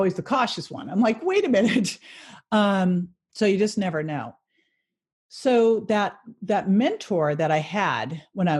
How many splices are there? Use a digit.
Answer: 0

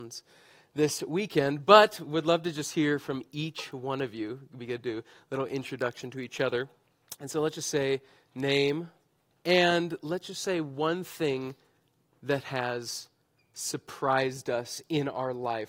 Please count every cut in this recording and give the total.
1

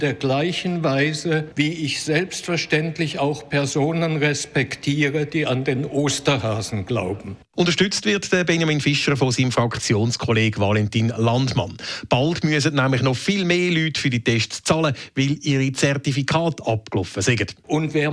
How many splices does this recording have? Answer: 1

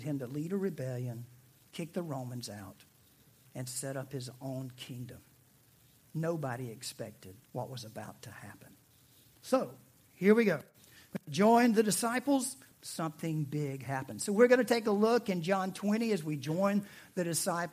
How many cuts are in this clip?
3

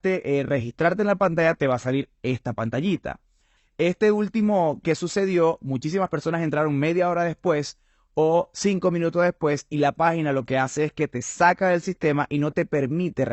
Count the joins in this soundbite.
1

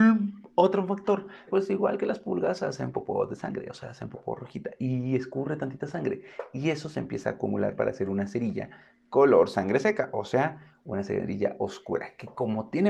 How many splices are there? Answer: 1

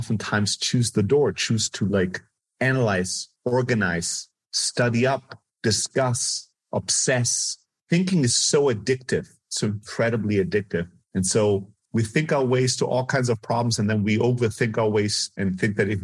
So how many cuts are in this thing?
0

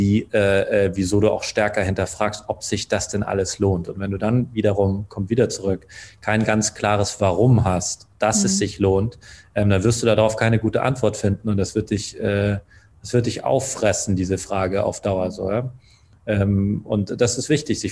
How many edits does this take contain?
0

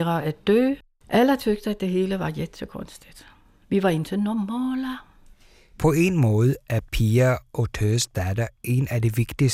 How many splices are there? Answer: 1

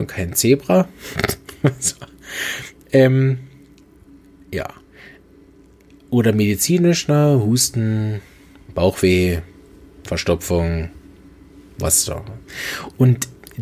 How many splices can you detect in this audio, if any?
0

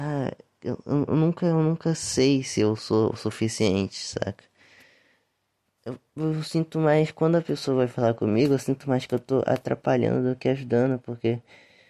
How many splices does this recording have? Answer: 0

